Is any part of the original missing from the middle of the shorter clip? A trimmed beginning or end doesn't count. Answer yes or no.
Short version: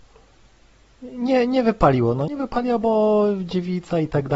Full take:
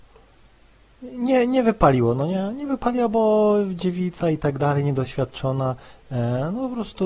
yes